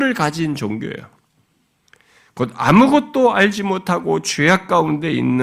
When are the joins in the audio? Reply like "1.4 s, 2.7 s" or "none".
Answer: none